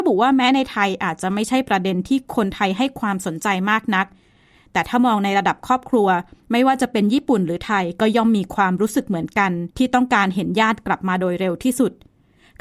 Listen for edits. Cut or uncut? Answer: cut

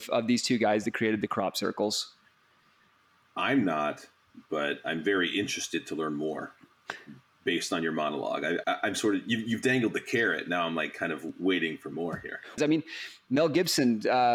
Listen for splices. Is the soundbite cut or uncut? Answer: cut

